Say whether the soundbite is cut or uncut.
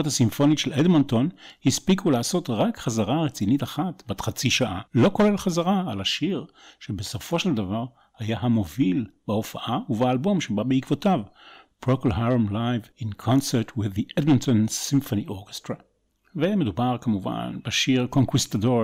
cut